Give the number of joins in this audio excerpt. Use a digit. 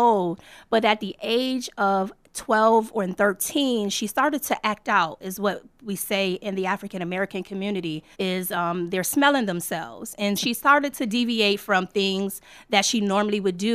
2